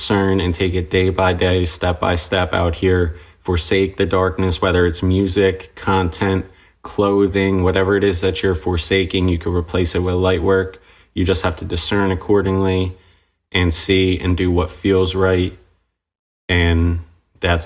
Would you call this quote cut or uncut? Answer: uncut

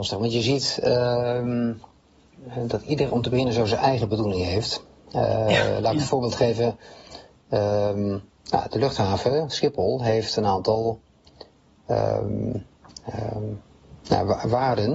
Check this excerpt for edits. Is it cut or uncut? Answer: uncut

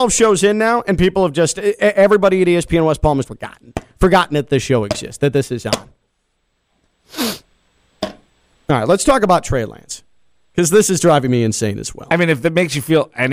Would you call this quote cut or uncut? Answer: cut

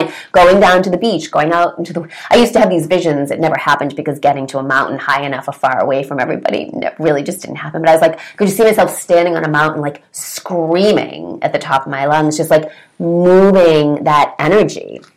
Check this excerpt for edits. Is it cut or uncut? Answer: uncut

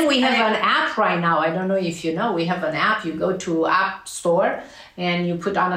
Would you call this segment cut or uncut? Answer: uncut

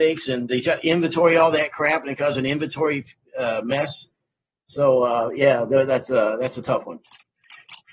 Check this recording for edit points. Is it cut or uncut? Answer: uncut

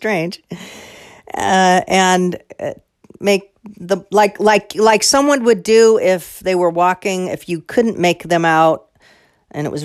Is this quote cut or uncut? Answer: uncut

